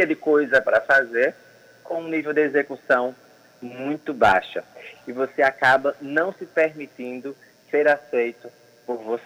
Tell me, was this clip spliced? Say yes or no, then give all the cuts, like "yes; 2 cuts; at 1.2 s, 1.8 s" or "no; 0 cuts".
yes; 1 cut; at 4.9 s